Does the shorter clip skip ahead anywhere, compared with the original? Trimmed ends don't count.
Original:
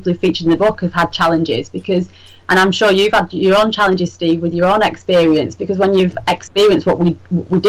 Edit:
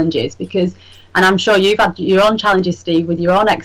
no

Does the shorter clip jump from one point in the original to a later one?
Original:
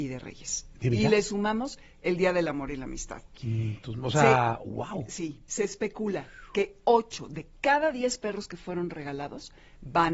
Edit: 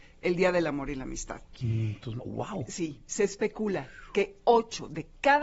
yes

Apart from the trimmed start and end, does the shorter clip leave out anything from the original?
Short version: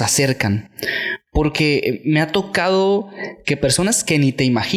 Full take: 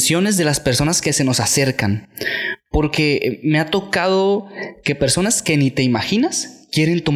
no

